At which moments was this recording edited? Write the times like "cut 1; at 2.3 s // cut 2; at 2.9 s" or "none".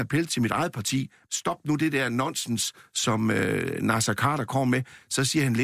cut 1; at 1.3 s

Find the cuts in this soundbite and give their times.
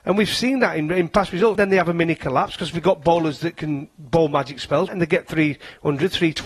cut 1; at 1.6 s // cut 2; at 4.9 s

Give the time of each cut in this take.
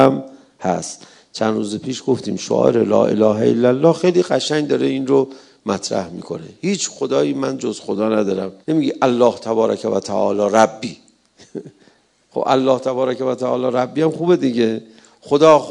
cut 1; at 8.6 s

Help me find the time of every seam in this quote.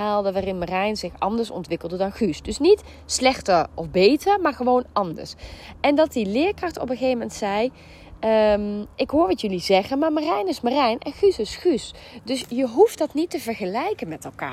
none

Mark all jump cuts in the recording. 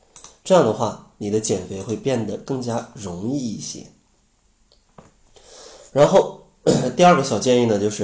none

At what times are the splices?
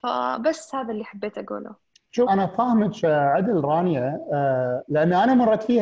cut 1; at 2.3 s

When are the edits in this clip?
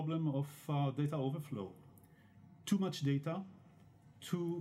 none

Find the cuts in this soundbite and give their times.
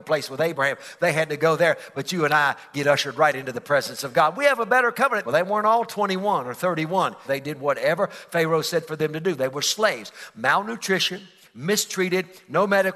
cut 1; at 5.2 s // cut 2; at 7.2 s

